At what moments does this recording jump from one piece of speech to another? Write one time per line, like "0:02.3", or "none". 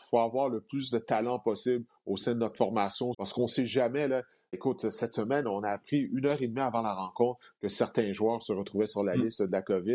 0:03.1
0:04.5